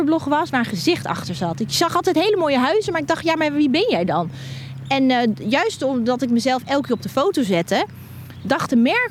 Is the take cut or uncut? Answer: uncut